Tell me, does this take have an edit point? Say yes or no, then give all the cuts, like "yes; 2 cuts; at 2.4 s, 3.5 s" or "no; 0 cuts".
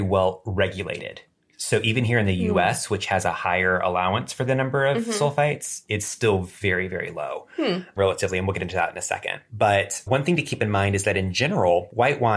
no; 0 cuts